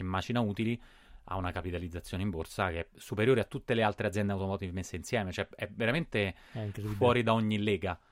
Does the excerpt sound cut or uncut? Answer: uncut